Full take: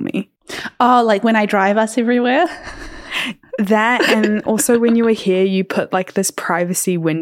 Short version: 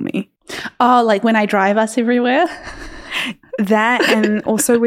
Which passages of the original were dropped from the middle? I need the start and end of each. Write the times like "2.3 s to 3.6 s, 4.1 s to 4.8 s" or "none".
none